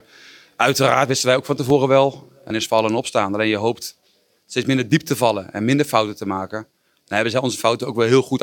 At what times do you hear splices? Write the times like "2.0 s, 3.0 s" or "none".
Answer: 2.5 s